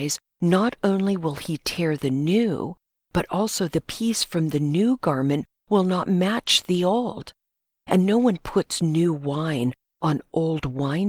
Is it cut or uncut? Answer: uncut